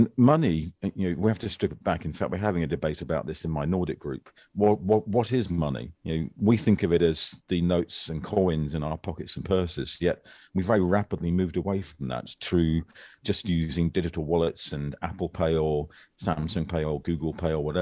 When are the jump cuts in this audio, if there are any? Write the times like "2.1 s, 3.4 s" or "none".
6.0 s